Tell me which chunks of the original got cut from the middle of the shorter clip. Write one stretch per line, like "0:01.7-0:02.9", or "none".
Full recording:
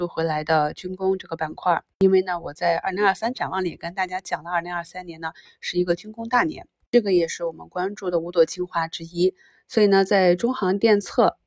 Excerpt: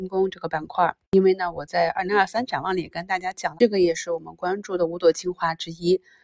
0:04.4-0:06.9